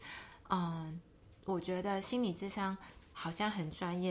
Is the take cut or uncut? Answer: cut